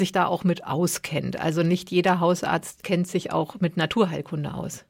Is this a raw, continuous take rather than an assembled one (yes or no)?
yes